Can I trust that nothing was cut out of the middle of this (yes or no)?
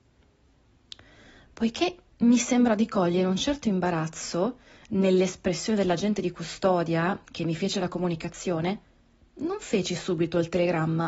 yes